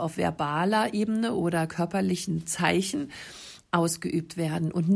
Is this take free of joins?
no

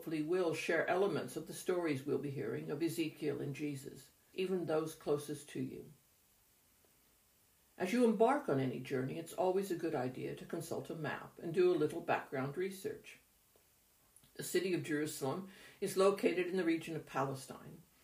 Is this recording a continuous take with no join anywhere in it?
no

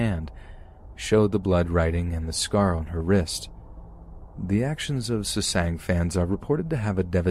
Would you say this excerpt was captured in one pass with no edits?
yes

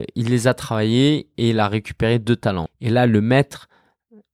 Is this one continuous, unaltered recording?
no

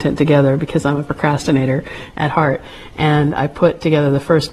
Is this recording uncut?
yes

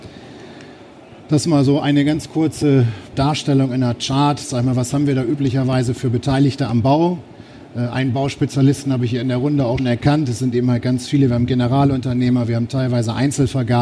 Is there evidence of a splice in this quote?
yes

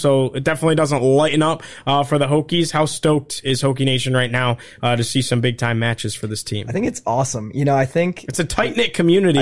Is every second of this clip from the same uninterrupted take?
yes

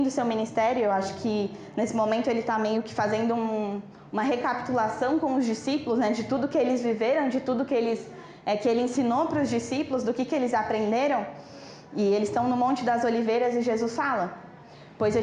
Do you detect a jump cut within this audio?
no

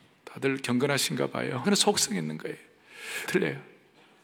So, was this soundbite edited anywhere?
yes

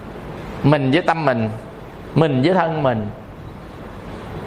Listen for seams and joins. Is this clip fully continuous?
yes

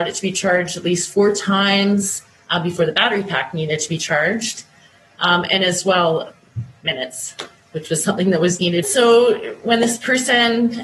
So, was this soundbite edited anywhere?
yes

